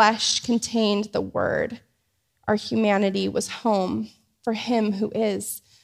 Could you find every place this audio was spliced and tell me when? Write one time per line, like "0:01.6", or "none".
none